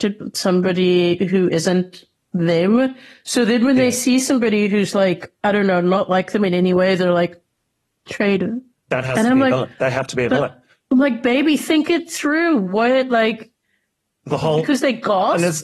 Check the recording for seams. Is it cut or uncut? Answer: uncut